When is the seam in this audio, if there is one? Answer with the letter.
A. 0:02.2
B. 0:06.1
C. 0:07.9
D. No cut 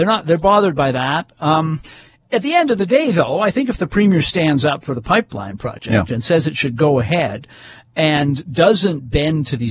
D